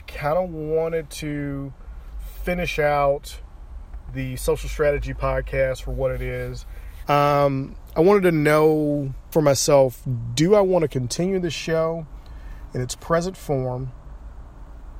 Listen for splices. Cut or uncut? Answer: cut